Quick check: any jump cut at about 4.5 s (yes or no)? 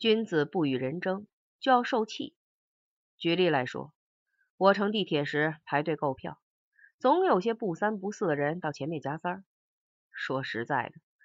no